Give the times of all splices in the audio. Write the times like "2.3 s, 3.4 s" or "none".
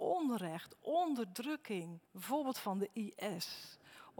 2.1 s